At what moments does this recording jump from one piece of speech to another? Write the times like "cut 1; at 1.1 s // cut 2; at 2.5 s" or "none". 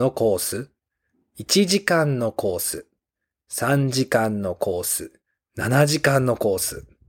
none